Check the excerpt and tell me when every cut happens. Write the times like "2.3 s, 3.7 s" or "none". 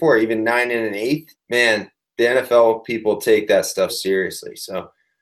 1.3 s, 3.9 s